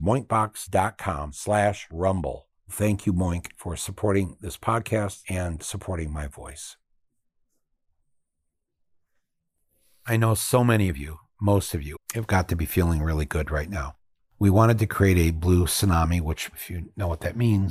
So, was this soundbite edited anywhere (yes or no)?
yes